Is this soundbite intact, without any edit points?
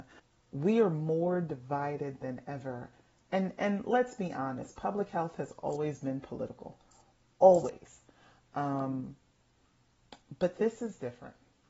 yes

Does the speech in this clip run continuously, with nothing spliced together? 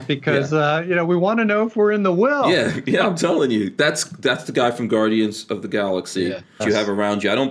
no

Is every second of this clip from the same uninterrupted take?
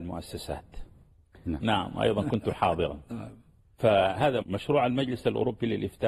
no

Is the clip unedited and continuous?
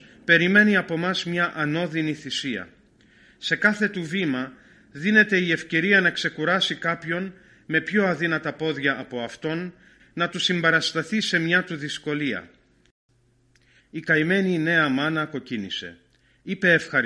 no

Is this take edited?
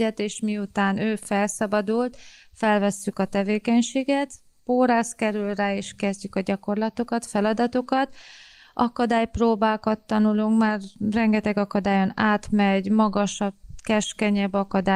no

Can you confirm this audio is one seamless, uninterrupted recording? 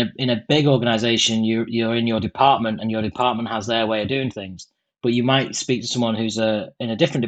yes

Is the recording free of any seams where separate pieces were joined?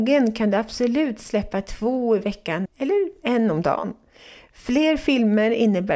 no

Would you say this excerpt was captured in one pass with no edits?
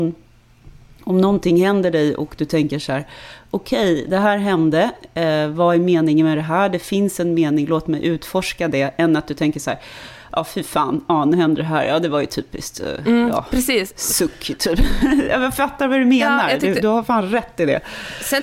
yes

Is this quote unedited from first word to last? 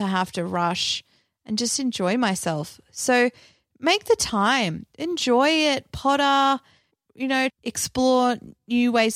no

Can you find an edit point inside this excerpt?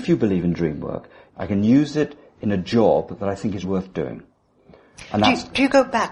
yes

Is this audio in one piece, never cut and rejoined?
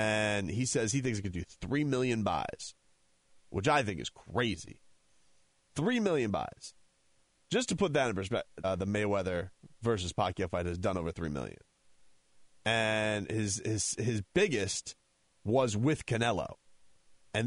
no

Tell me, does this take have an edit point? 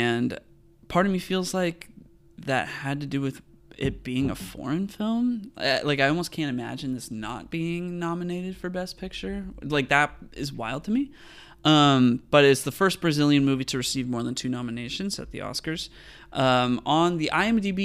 no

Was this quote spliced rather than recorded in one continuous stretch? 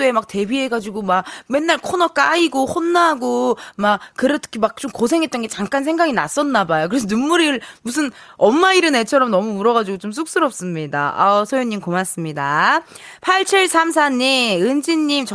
no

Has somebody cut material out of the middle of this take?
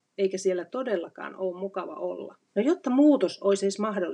yes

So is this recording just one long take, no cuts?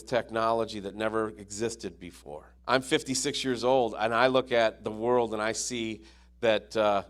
no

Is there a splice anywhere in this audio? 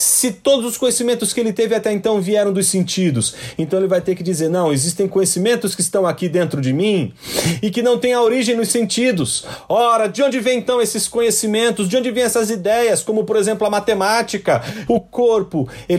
yes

